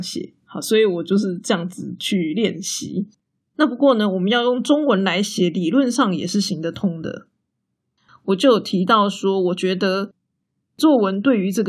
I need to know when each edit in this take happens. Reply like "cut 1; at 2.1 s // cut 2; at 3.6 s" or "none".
cut 1; at 8.1 s